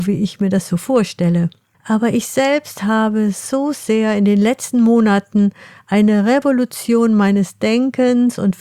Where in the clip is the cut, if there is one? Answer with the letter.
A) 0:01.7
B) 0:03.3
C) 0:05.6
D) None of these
A